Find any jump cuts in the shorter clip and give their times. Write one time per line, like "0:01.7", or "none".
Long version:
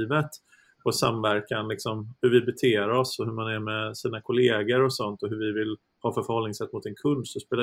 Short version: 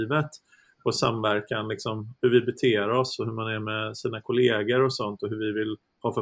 none